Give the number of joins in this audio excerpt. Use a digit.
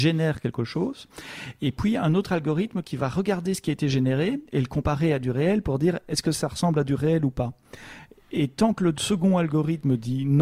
0